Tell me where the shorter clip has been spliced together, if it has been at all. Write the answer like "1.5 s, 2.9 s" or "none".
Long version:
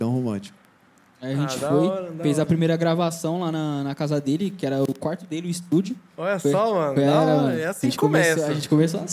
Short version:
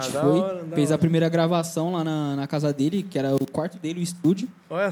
none